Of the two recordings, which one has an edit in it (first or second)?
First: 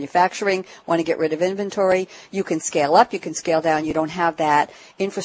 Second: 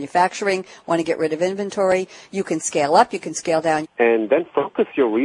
second